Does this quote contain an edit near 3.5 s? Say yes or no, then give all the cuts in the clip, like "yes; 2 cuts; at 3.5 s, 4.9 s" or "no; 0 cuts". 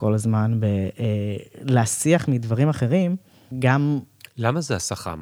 yes; 1 cut; at 3.5 s